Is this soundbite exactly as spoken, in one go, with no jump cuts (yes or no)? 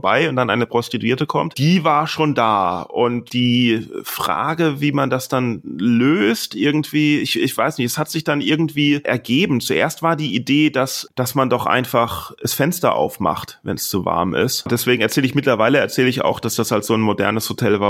yes